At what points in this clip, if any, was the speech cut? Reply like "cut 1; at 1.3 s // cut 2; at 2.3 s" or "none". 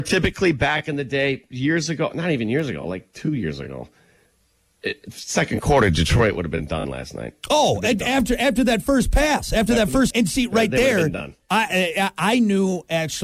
cut 1; at 10.1 s

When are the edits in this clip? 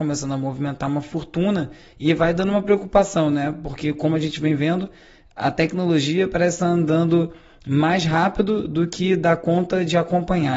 none

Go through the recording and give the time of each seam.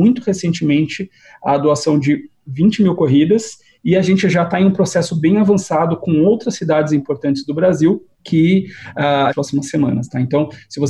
cut 1; at 8.1 s // cut 2; at 9.3 s

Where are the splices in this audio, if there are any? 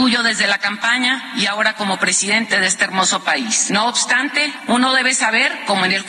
none

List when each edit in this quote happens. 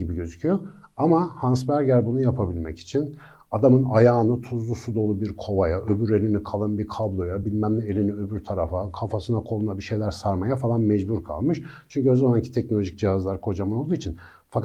none

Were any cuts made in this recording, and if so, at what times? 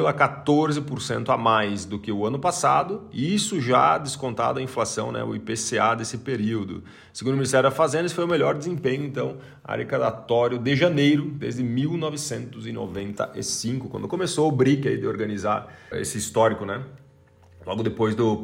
cut 1; at 15.9 s

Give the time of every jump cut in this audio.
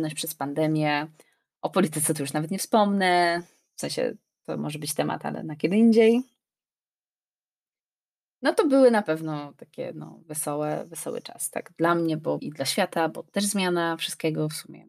cut 1; at 12.4 s

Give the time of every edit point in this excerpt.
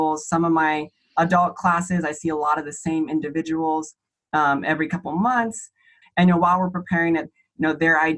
cut 1; at 6.0 s // cut 2; at 7.2 s

